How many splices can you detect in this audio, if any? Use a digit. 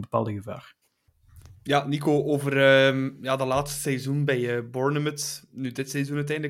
0